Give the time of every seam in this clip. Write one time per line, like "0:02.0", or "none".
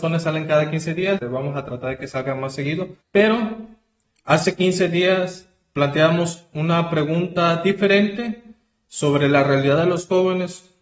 0:01.2
0:03.0